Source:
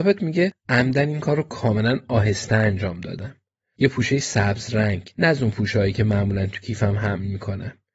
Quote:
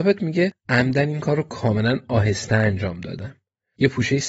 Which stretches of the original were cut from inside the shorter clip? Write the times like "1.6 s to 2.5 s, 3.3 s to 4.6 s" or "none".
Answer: none

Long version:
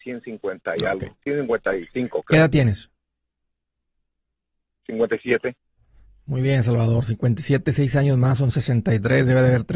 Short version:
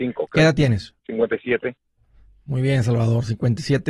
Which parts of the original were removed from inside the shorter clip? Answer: 2.9 s to 4.8 s

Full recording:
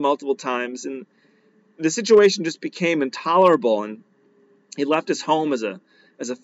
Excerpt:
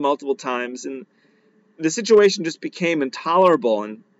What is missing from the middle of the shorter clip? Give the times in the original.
none

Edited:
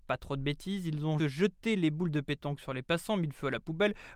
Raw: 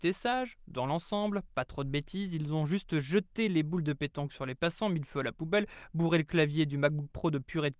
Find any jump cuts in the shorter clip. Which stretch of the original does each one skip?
2.7 s to 2.9 s

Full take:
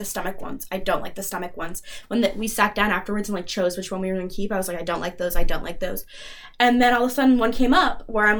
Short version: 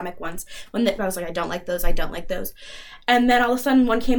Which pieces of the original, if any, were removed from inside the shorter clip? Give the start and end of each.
2.3 s to 4.5 s

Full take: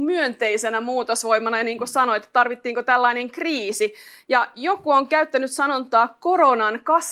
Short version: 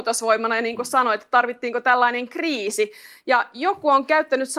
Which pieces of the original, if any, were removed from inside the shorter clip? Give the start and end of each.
none

